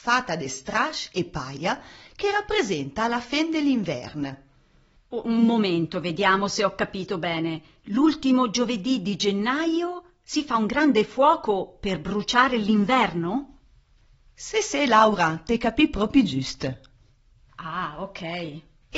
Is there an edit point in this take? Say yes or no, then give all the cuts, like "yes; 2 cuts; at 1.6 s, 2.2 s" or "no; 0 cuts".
no; 0 cuts